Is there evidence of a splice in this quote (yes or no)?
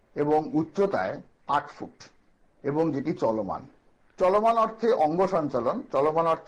no